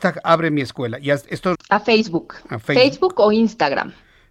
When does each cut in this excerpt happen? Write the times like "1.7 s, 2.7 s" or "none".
1.5 s